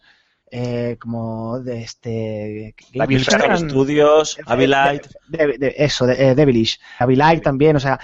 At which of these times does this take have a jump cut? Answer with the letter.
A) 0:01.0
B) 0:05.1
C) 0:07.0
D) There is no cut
C